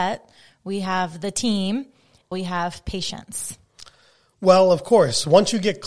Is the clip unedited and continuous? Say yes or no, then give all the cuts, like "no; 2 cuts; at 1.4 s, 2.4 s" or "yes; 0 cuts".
no; 1 cut; at 2.3 s